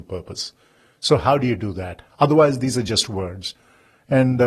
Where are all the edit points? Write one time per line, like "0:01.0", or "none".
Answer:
0:02.1

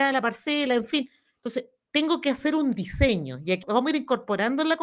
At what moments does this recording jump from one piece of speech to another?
0:03.6

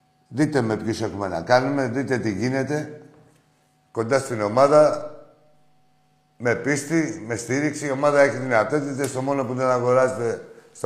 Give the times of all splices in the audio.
none

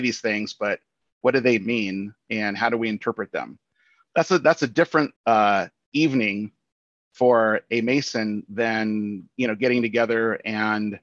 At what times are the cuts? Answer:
0:05.2

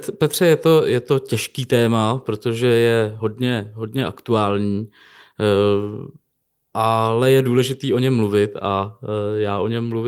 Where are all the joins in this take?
none

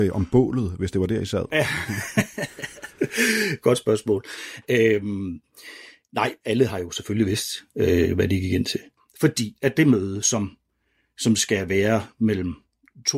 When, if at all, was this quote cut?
none

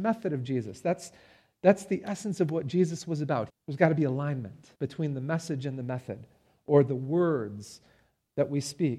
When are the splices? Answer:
0:03.5
0:04.7

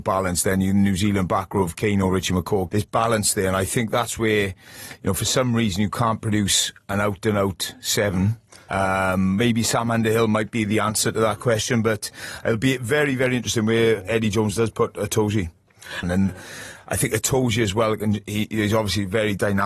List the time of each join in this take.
0:02.7
0:16.0

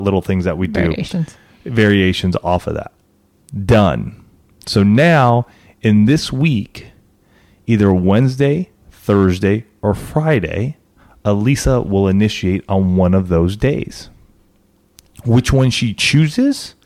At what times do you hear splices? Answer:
none

